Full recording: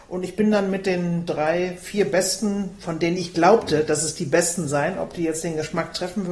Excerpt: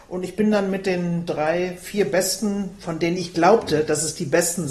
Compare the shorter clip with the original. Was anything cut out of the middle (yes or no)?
no